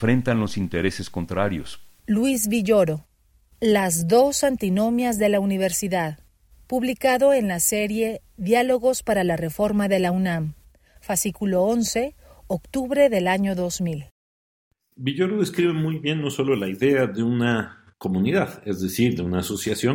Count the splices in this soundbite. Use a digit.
1